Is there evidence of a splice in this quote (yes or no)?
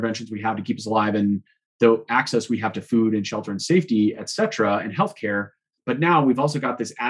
yes